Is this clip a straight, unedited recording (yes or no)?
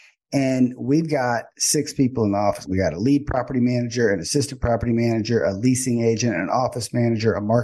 yes